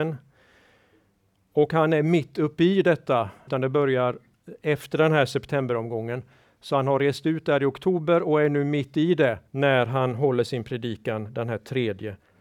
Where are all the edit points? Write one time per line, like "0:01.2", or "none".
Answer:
0:03.5
0:09.5